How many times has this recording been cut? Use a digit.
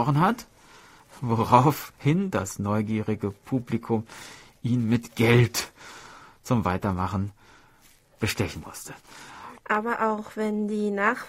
1